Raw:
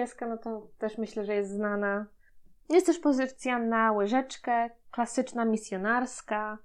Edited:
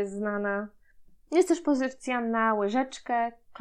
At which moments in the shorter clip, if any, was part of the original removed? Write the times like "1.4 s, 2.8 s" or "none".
none